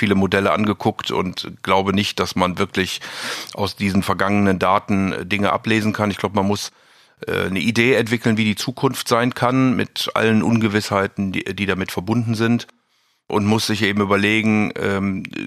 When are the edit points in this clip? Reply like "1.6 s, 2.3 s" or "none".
none